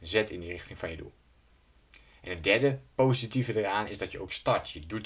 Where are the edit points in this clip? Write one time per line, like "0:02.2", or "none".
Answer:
none